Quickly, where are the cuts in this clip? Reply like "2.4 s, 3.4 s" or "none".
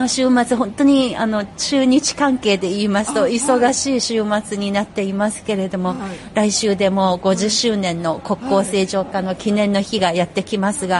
none